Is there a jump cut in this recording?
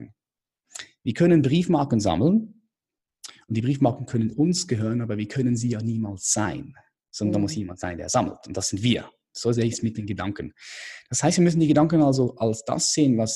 no; 0 cuts

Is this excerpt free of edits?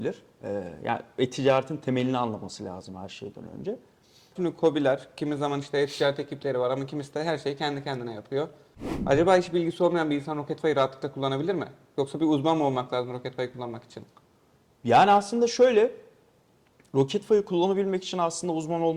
no; 1 cut; at 4.4 s

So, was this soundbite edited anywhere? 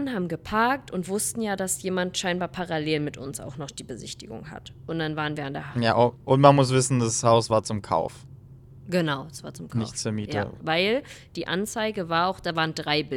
yes; 1 cut; at 10.6 s

